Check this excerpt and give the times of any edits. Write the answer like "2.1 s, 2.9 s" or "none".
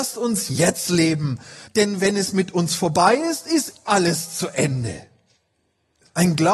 1.7 s, 3.9 s